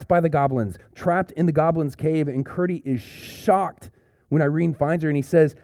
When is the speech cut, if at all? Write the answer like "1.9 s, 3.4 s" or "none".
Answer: none

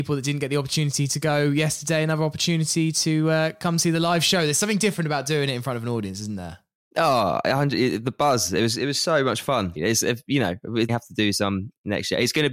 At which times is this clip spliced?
9.8 s, 10.9 s

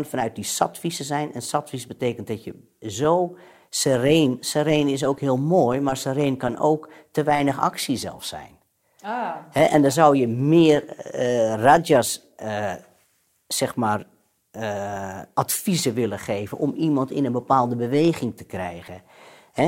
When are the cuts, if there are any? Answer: none

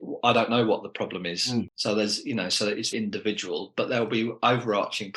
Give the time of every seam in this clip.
1.7 s, 2.9 s

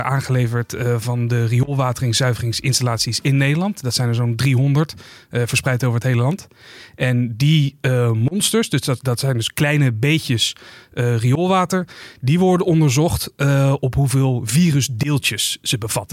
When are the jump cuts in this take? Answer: none

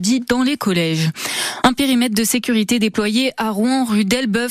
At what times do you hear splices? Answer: none

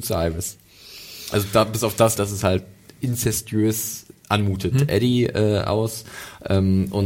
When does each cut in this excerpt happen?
2.2 s, 4.7 s

